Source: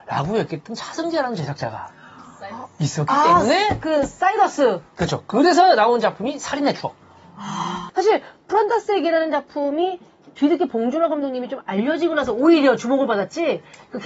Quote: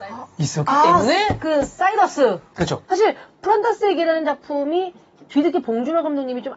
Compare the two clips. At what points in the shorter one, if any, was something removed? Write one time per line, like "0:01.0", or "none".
0:02.8